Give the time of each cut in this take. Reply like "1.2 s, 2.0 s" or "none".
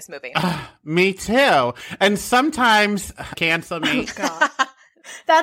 3.3 s

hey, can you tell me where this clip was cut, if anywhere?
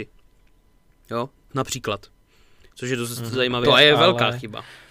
3.6 s

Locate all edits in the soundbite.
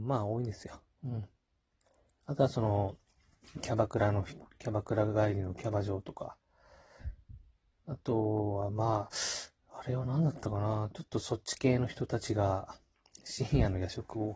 7.0 s

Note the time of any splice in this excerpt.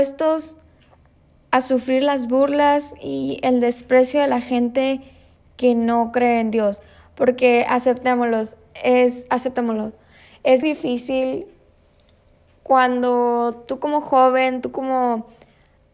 10.6 s

